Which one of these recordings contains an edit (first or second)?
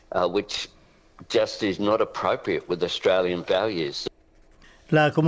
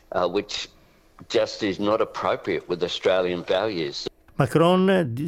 second